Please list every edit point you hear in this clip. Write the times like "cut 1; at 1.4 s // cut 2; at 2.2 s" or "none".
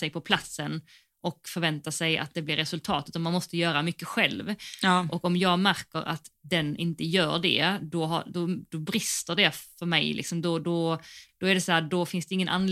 none